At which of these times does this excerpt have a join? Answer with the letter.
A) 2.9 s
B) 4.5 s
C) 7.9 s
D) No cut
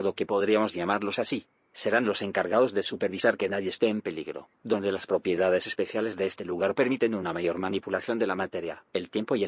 B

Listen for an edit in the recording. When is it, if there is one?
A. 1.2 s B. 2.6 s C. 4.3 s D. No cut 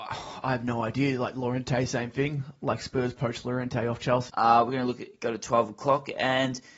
C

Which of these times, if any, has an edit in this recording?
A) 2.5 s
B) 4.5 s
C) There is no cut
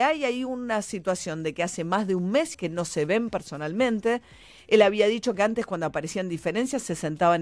A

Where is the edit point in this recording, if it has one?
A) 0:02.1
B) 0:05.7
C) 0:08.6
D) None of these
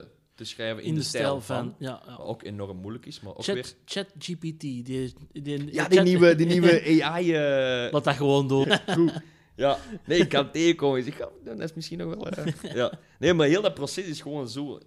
C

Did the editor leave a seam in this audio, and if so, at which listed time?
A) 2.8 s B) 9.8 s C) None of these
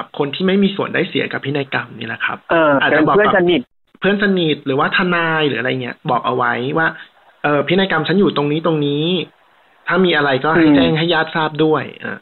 A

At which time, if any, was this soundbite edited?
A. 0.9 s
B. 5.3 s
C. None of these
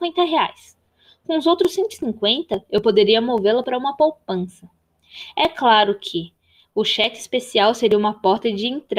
C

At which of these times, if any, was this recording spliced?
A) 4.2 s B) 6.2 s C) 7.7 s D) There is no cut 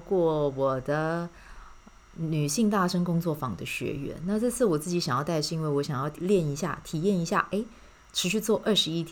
B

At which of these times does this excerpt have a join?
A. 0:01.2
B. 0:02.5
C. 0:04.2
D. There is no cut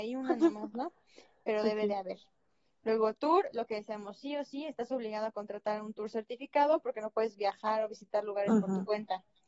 D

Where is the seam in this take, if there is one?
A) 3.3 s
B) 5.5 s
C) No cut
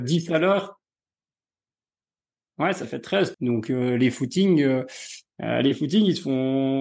A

